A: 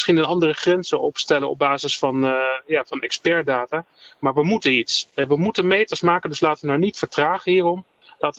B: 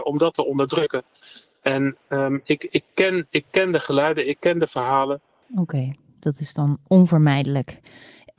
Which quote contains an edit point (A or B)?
B